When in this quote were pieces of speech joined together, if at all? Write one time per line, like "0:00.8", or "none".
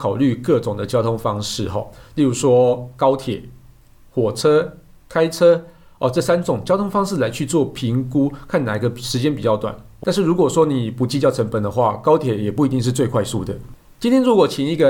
0:10.0